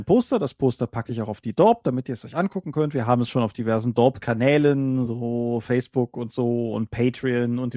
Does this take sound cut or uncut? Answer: uncut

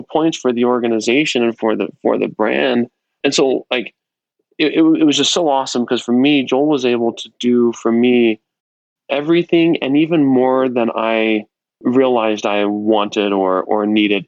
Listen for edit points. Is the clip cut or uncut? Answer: uncut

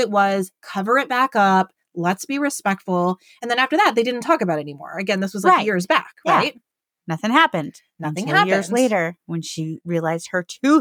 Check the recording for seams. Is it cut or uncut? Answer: uncut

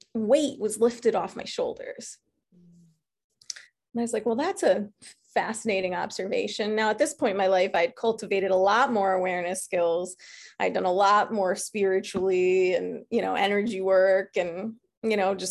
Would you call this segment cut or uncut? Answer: uncut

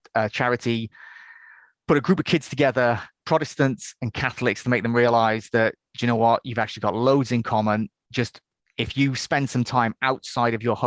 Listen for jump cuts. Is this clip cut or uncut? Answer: uncut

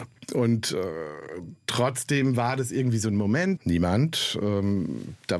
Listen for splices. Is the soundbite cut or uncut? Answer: cut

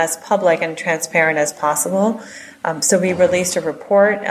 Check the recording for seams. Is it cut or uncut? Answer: uncut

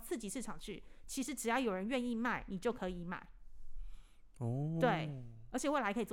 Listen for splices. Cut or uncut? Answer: uncut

